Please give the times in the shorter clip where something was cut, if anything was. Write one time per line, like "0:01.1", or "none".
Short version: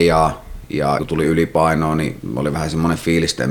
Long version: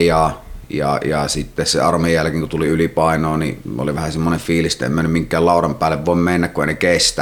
0:01.0